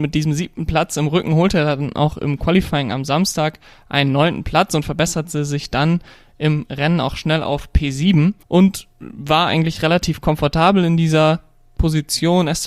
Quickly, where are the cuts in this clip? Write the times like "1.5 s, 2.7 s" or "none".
8.4 s